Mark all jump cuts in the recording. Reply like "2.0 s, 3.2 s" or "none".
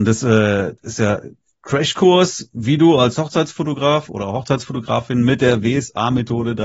none